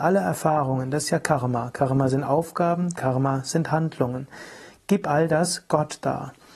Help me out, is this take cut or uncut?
cut